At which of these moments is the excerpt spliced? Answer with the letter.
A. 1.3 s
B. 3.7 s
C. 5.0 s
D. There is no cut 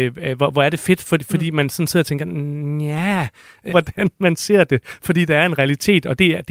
B